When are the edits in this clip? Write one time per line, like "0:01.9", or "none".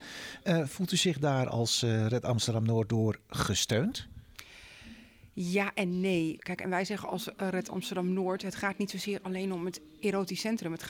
0:06.4